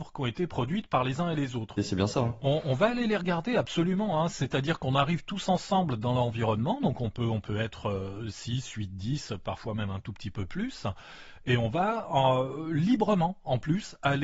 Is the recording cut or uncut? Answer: cut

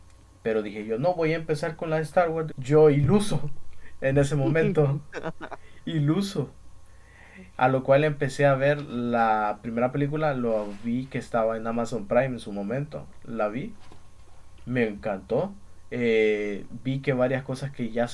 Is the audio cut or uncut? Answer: cut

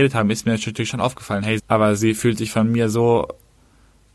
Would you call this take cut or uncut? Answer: cut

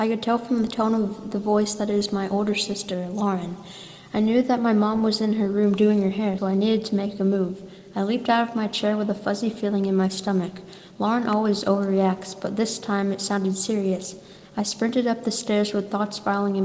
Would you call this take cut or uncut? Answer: cut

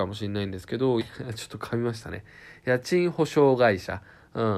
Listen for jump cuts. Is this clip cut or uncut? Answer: cut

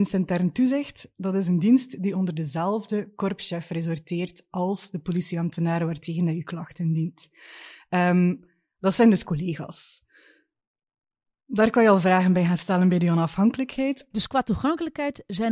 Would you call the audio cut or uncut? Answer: cut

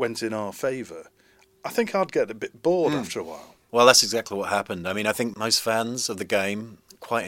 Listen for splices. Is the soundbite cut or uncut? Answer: uncut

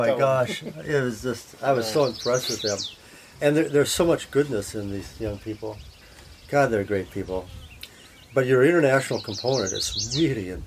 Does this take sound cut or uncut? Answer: uncut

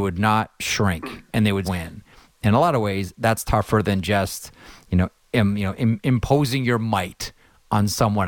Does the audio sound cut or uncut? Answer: cut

